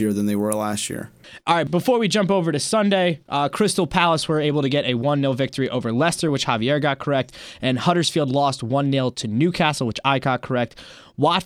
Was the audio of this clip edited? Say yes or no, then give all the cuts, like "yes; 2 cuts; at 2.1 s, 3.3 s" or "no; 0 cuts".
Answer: no; 0 cuts